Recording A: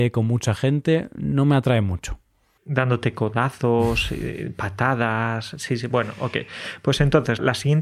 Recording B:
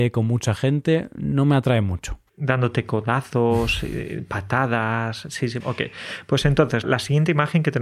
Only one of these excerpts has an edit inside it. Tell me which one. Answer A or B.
B